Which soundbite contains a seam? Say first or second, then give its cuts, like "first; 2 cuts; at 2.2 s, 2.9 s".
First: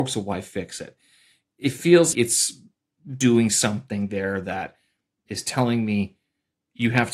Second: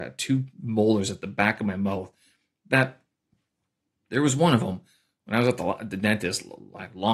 first; 1 cut; at 2.1 s